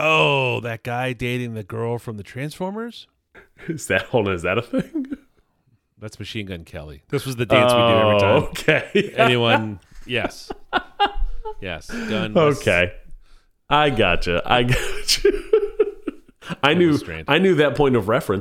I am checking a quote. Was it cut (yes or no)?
no